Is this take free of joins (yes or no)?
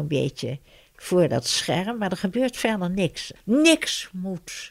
no